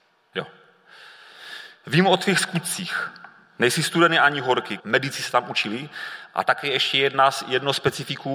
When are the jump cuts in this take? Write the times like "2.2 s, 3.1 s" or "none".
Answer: 4.8 s